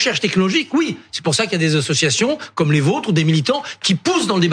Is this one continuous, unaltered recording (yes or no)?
yes